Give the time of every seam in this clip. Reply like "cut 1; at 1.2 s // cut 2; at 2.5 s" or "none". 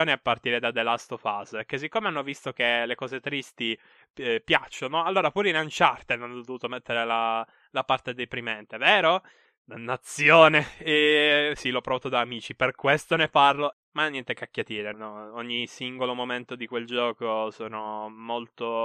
cut 1; at 9.4 s // cut 2; at 13.7 s // cut 3; at 14.9 s

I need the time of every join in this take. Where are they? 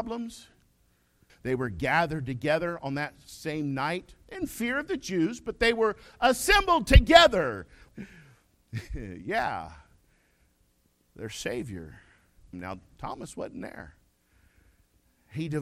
cut 1; at 1.3 s // cut 2; at 7.9 s // cut 3; at 12.5 s

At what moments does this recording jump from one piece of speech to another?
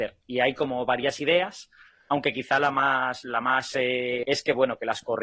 cut 1; at 4.2 s

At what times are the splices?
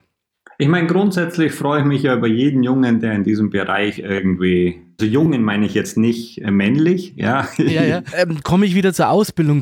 cut 1; at 5.0 s // cut 2; at 8.1 s

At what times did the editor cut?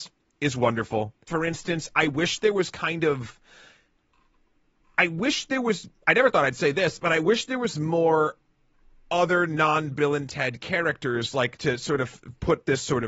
cut 1; at 1.3 s

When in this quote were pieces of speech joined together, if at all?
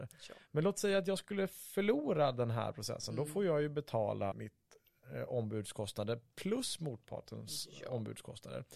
cut 1; at 4.3 s

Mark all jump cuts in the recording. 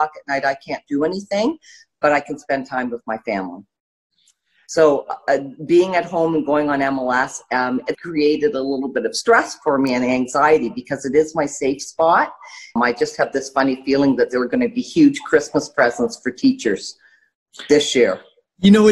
cut 1; at 7.9 s // cut 2; at 12.8 s

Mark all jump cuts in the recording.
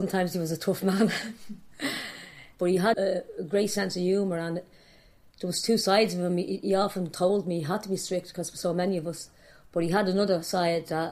cut 1; at 2.9 s

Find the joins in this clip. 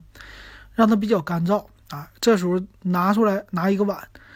none

